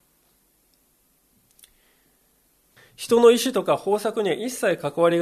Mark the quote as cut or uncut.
cut